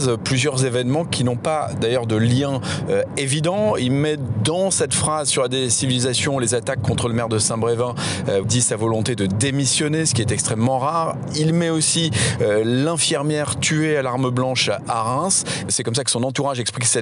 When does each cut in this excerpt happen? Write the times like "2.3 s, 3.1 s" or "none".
8.4 s, 15.7 s

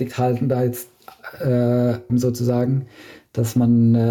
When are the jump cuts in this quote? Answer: 2.1 s

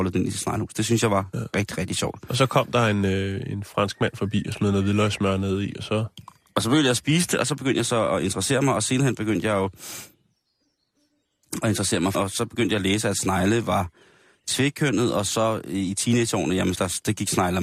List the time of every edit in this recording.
12.1 s, 16.7 s

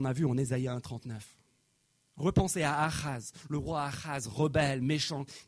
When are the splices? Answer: none

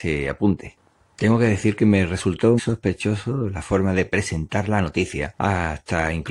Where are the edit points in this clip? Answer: 2.6 s

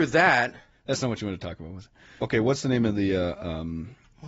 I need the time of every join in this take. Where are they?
2.2 s

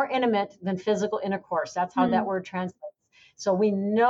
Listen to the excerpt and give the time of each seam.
none

